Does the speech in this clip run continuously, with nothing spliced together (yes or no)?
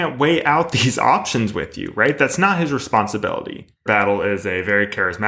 no